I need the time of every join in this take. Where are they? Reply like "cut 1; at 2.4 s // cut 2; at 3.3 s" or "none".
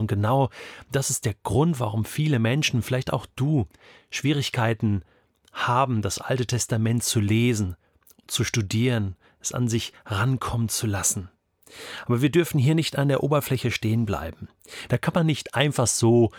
cut 1; at 14.9 s